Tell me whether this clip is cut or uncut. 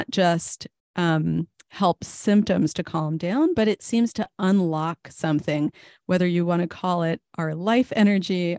uncut